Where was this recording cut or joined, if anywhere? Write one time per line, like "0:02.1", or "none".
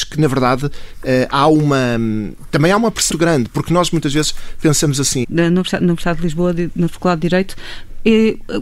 0:03.1
0:05.2